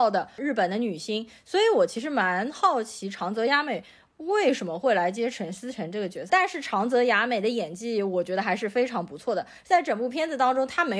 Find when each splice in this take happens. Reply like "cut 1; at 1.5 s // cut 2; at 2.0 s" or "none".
cut 1; at 6.3 s